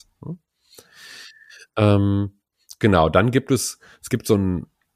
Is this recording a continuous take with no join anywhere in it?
yes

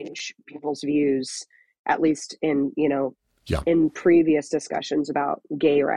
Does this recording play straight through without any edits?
yes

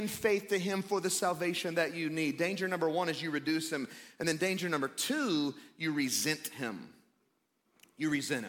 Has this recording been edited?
no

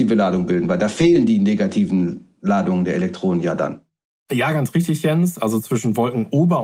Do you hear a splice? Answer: no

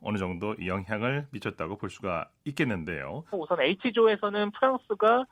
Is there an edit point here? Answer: yes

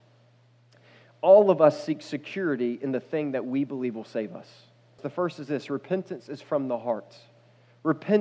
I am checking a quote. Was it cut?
yes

